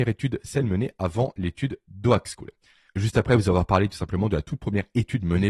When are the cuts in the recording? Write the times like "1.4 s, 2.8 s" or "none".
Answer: 2.9 s